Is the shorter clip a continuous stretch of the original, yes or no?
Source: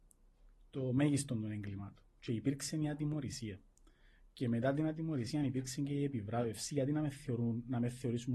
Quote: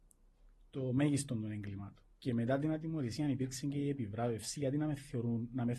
no